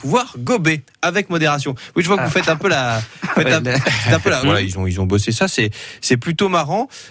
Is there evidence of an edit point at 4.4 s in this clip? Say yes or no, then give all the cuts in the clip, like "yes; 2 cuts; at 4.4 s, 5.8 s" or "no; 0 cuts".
yes; 1 cut; at 4.4 s